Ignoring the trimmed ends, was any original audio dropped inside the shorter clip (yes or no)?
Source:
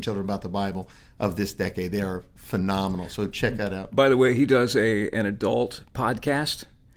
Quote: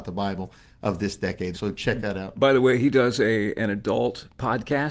yes